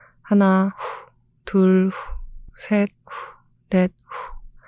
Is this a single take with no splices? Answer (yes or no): yes